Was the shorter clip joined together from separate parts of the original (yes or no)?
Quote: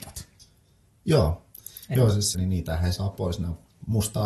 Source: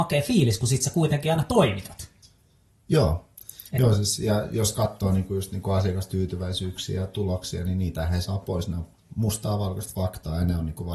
yes